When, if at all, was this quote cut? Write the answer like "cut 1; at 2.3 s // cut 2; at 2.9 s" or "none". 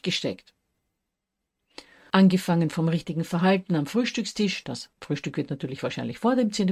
cut 1; at 2.1 s // cut 2; at 4.9 s